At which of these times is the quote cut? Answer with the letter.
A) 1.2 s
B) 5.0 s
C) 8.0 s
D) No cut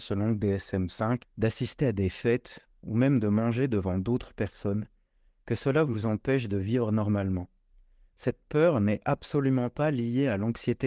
A